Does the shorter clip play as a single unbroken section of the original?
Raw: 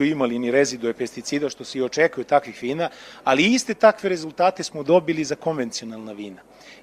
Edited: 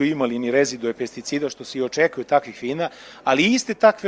yes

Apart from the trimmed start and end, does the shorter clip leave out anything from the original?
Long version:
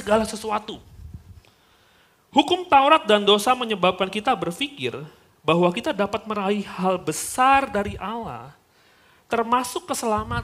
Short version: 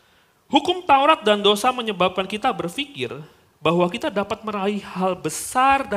no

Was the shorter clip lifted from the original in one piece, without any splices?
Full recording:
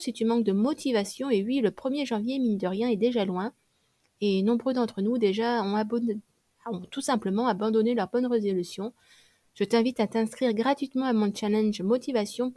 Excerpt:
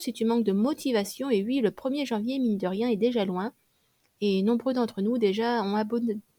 yes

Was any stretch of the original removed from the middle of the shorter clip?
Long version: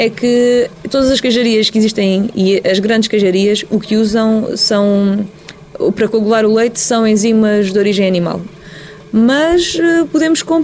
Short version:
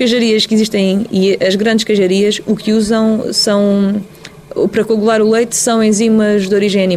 no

